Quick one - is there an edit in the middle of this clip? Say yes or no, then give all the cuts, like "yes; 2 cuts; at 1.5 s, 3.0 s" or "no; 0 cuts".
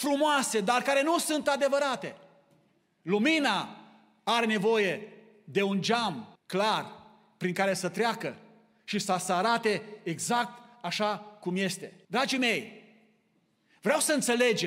yes; 2 cuts; at 6.4 s, 12.1 s